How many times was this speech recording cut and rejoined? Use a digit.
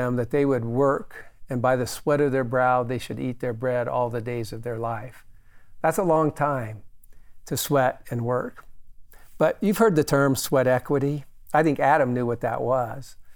0